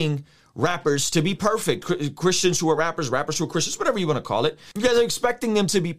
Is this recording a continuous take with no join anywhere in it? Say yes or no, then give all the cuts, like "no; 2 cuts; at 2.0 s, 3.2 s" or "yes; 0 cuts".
yes; 0 cuts